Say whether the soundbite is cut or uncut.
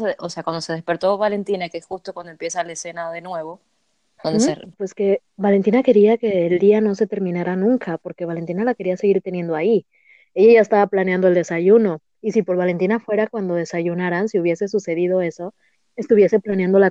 cut